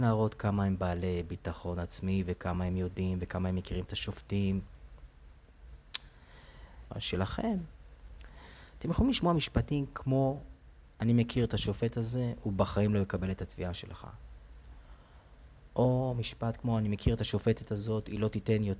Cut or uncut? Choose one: cut